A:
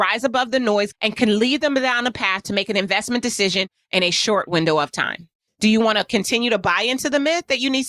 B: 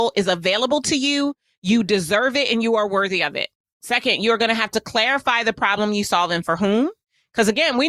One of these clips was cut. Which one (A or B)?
A